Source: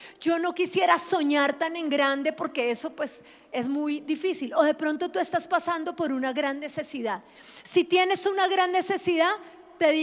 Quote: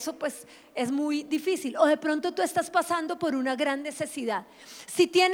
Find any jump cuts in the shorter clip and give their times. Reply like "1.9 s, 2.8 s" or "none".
none